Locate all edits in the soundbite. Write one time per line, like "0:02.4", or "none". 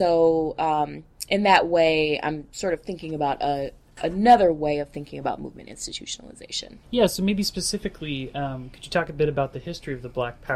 0:06.8